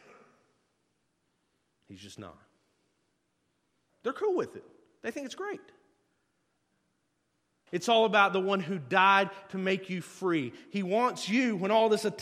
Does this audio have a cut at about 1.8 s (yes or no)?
no